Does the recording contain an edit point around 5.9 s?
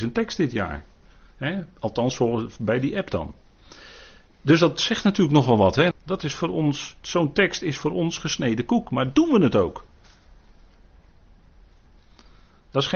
yes; 1 cut; at 5.9 s

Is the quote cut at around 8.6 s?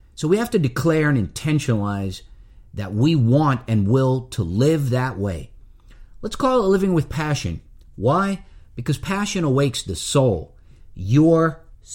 no; 0 cuts

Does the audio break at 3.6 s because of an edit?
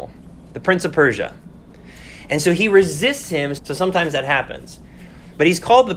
yes; 1 cut; at 3.6 s

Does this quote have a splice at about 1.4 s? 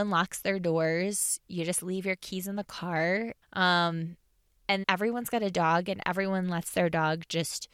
no; 2 cuts; at 3.4 s, 4.8 s

